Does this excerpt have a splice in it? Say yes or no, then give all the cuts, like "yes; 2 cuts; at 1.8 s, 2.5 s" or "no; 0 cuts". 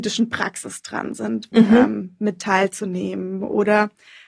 yes; 1 cut; at 1.5 s